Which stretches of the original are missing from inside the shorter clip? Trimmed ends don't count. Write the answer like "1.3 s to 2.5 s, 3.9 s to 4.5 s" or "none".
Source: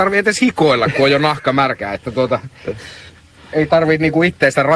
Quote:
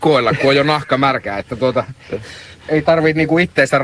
3.2 s to 3.4 s